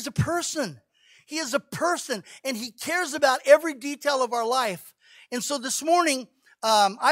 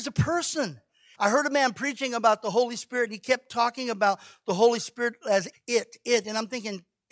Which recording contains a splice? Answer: second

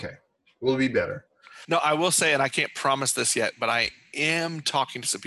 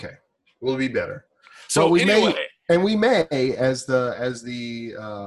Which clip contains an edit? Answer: first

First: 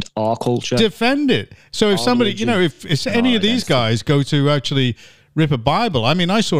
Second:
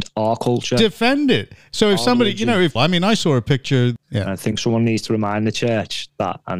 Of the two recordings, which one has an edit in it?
second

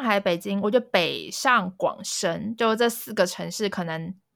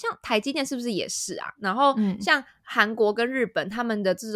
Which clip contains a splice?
second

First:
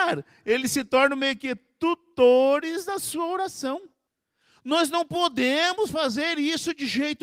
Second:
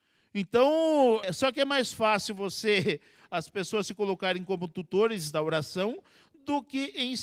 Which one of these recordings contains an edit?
second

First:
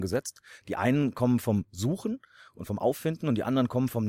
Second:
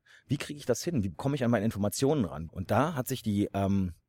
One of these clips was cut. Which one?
second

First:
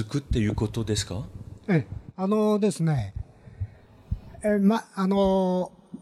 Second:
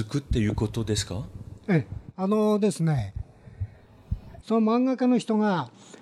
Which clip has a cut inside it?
second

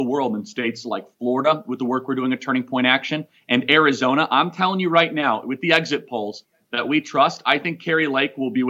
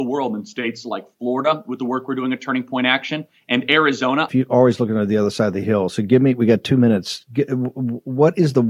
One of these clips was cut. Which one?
second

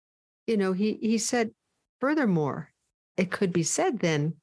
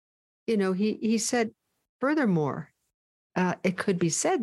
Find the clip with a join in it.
first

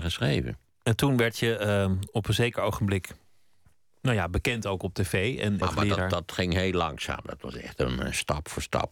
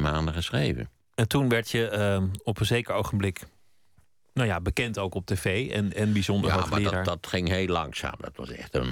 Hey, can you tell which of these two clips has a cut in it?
first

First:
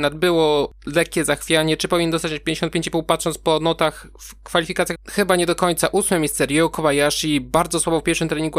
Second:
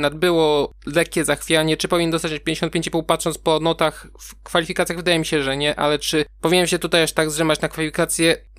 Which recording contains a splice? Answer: first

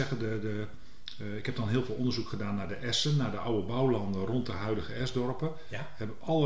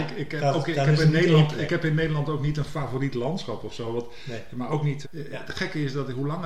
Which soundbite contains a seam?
second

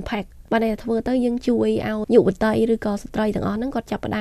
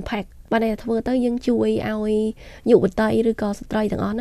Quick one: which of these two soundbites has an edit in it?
first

